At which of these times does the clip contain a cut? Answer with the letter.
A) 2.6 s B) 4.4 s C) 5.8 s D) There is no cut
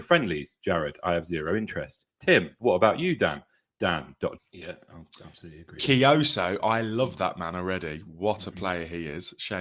B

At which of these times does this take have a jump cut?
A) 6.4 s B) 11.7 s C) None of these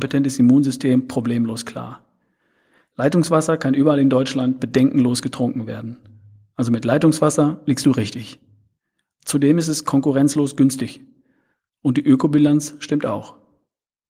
C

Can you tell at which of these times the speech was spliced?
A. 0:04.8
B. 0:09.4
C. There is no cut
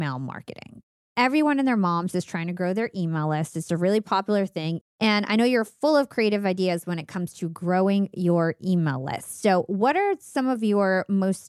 A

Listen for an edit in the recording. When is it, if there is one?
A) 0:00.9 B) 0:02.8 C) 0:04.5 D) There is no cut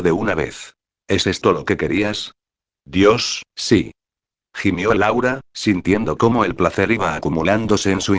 A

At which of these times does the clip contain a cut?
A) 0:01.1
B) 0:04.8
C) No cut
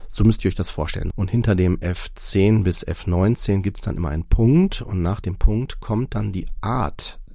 A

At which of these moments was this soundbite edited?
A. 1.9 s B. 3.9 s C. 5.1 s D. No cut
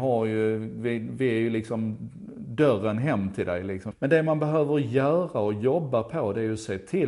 B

